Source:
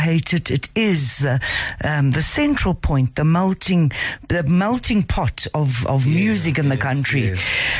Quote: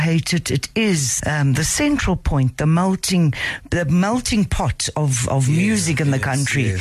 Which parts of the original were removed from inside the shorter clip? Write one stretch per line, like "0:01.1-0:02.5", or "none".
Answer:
0:01.2-0:01.8